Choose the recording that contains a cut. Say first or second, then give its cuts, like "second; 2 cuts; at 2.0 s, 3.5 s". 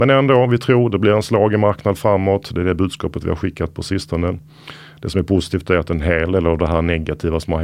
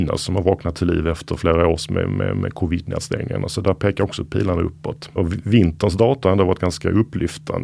second; 1 cut; at 5.2 s